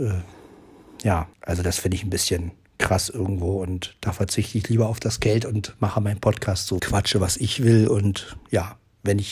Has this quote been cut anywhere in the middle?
yes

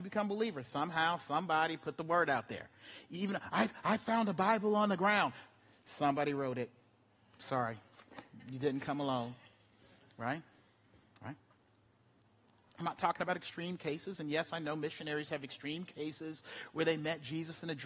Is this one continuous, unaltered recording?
yes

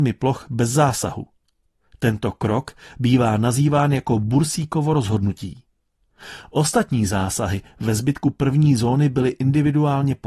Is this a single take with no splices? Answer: yes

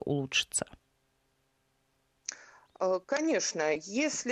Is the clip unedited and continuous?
no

